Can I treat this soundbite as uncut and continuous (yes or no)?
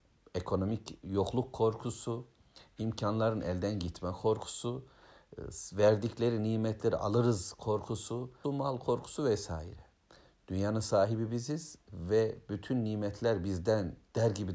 no